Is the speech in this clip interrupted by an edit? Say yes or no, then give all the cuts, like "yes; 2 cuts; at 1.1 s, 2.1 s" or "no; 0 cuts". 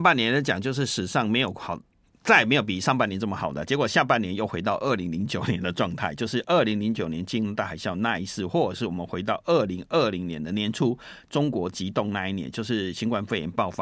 no; 0 cuts